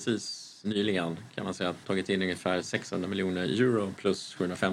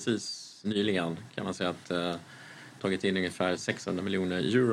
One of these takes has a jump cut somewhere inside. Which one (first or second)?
first